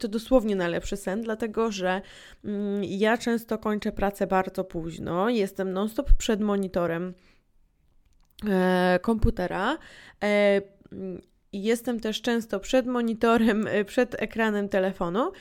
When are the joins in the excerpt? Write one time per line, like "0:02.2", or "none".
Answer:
none

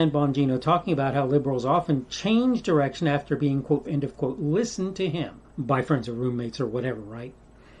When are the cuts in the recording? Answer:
0:03.9
0:05.5

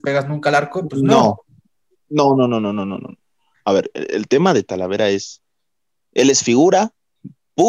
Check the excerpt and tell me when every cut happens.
none

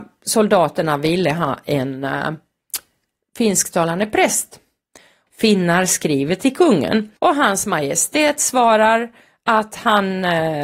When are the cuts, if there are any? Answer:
0:05.3
0:07.2

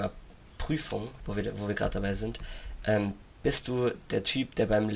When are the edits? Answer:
none

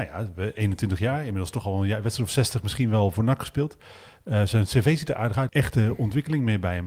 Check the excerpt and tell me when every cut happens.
0:05.5

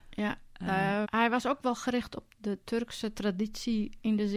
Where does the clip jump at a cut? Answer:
0:01.0
0:02.3

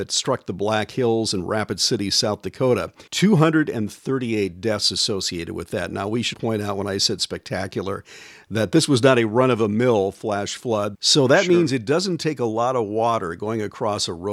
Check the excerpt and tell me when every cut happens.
0:03.1
0:06.3
0:10.9

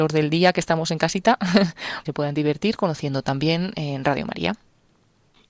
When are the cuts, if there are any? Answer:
0:02.0

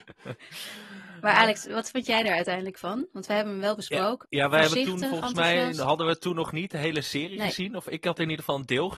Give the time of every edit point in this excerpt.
0:04.2

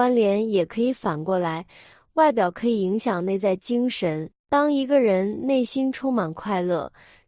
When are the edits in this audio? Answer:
0:04.4

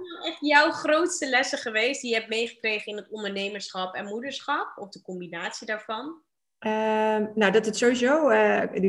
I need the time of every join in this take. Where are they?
none

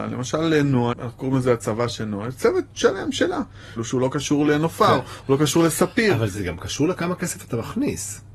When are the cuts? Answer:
0:00.9
0:03.8

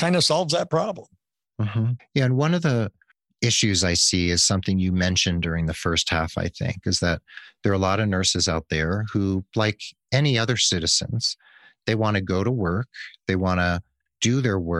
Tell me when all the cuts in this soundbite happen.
0:02.0

